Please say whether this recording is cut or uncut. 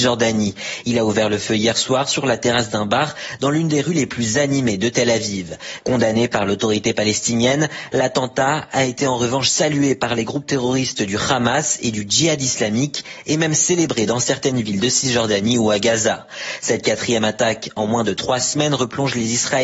cut